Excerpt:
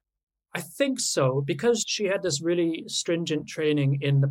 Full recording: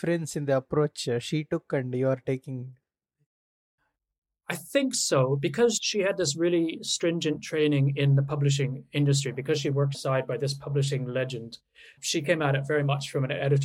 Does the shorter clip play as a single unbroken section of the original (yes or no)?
yes